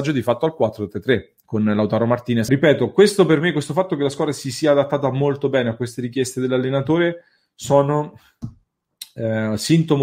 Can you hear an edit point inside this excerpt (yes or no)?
yes